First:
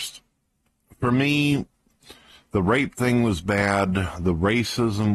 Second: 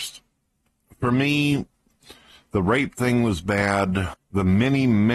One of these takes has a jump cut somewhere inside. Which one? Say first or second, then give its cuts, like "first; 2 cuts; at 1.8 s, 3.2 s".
second; 1 cut; at 4.1 s